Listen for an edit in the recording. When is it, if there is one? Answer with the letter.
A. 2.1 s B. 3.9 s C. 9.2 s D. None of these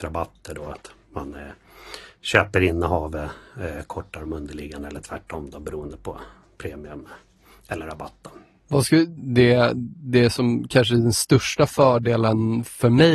C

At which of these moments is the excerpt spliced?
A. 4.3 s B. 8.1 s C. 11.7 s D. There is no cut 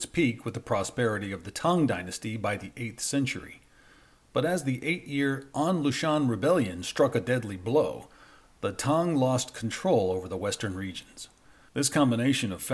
C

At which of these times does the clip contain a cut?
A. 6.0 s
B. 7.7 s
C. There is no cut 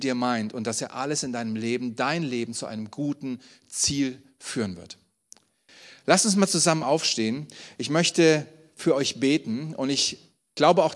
C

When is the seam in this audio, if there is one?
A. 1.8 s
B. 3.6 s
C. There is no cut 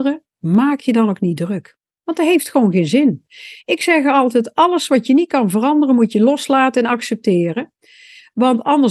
C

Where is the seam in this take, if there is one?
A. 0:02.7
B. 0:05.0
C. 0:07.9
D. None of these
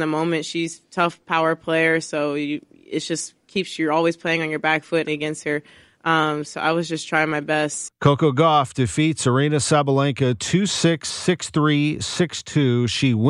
B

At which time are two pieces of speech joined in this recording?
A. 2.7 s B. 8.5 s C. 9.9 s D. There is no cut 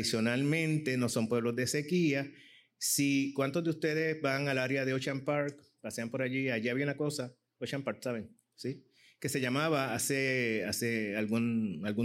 D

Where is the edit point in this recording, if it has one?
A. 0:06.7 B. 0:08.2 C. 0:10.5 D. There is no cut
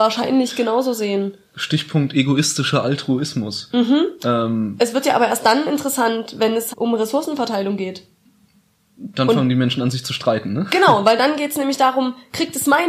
A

